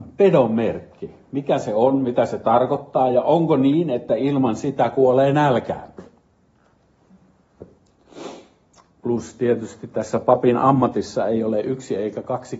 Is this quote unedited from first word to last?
yes; 0 cuts

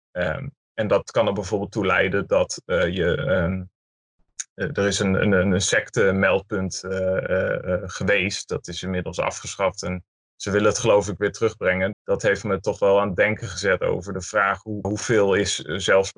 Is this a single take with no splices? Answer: no; 2 cuts; at 11.9 s, 14.8 s

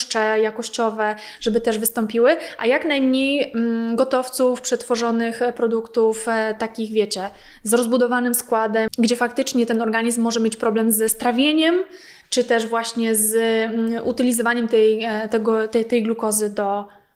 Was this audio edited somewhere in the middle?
yes; 1 cut; at 8.9 s

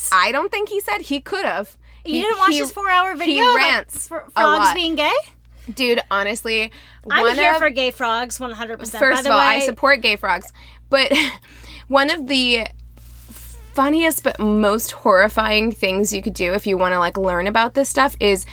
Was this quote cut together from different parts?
no; 0 cuts

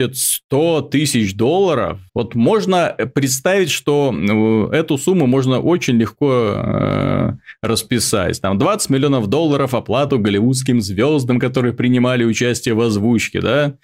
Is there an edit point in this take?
yes; 1 cut; at 2.1 s

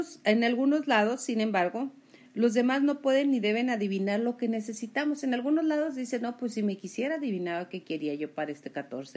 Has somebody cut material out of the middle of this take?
no; 0 cuts

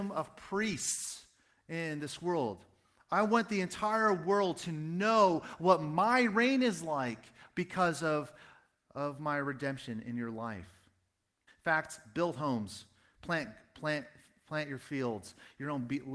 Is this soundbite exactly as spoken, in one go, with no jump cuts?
no; 1 cut; at 11.5 s

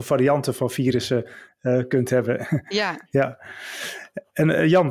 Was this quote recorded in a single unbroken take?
yes; 0 cuts

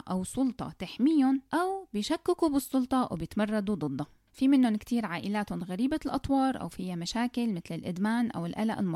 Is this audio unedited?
no; 1 cut; at 1.5 s

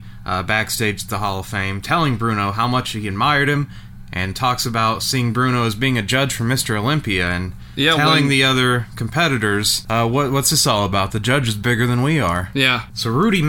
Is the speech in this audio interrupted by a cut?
no; 0 cuts

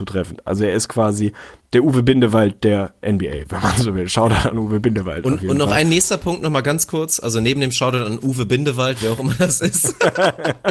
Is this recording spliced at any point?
no; 0 cuts

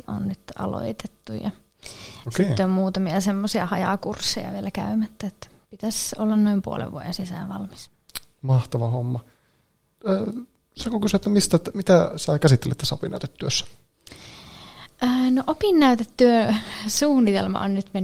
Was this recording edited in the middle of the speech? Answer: no; 0 cuts

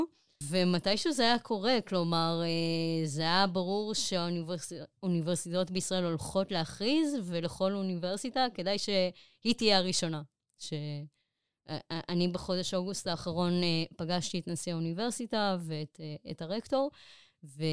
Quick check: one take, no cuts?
yes; 0 cuts

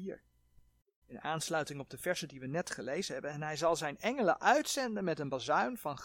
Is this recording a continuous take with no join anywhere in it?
no; 1 cut; at 1.0 s

